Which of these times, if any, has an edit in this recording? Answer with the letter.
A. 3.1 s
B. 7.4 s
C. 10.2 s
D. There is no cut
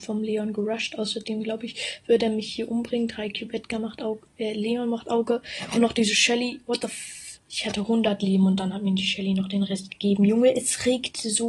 B